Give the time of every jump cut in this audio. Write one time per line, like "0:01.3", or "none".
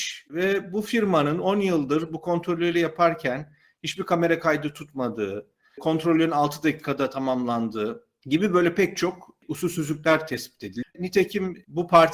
0:10.8